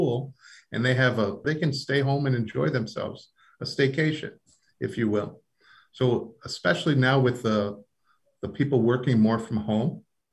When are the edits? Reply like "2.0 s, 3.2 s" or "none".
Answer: 1.4 s

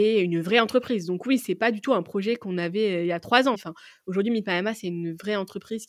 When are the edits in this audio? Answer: 3.5 s

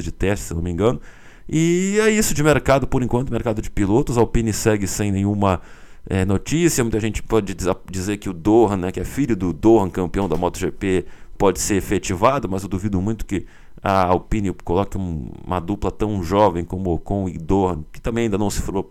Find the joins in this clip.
8.9 s

